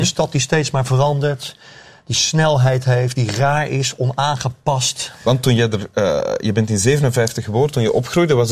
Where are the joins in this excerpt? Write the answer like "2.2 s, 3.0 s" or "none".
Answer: none